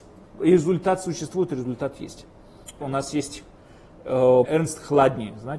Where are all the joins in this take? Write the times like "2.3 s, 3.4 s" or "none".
2.8 s, 4.4 s